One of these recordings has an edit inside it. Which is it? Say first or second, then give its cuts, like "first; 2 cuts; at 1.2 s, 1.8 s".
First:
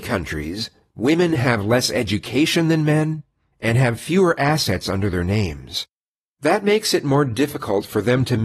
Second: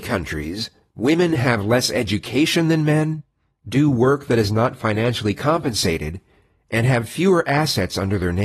first; 1 cut; at 3.5 s